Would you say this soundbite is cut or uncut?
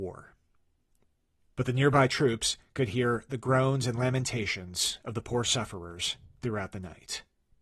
cut